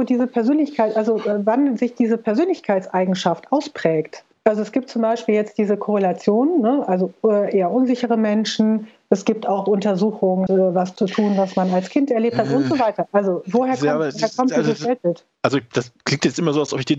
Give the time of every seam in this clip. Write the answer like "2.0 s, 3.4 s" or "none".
10.5 s